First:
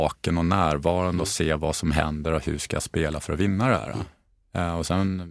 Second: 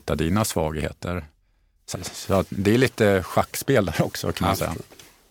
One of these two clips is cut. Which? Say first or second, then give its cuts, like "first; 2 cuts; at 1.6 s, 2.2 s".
second; 1 cut; at 1.9 s